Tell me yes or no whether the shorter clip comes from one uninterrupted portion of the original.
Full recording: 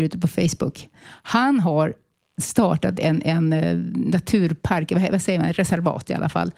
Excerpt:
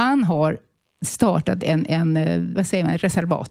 no